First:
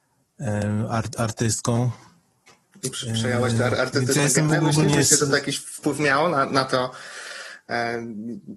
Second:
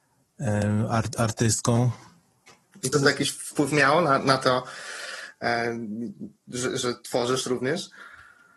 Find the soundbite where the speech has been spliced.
second; 1 cut; at 2.9 s

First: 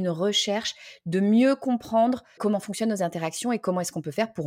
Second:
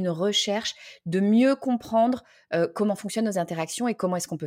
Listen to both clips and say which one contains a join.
first; 1 cut; at 2.4 s

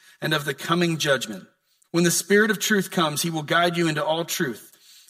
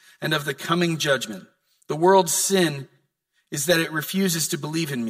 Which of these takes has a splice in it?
first; 1 cut; at 1.8 s

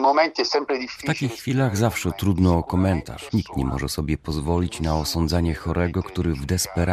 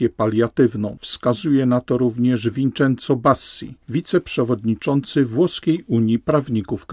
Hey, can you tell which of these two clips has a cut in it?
first; 1 cut; at 3.3 s

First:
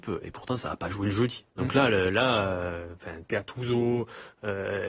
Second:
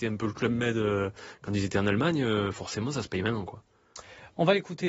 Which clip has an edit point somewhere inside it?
first; 2 cuts; at 1.5 s, 3.2 s

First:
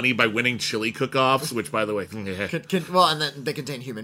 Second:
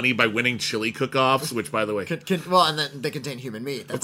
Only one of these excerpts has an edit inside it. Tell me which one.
second; 1 cut; at 2.1 s

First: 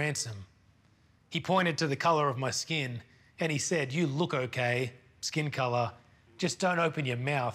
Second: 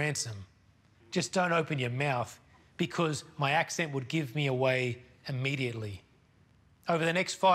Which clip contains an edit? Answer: second; 1 cut; at 0.9 s

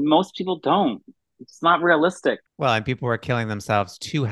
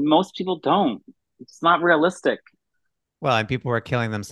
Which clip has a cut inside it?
first; 1 cut; at 2.5 s

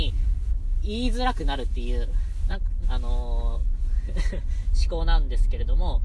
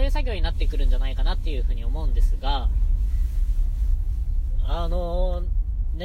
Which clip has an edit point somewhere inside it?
first; 2 cuts; at 2.8 s, 4.7 s

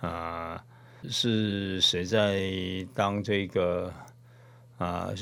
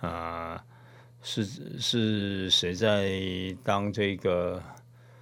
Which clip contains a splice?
first; 1 cut; at 1.0 s

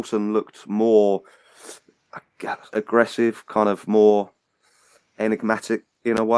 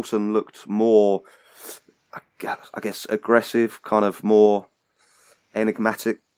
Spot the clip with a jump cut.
first; 1 cut; at 2.7 s

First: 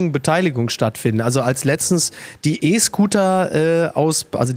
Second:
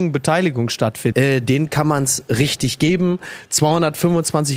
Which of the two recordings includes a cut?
second; 1 cut; at 1.1 s

